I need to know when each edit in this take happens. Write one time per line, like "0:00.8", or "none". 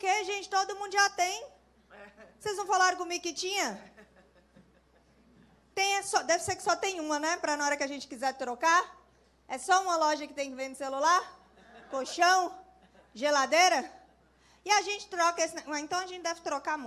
none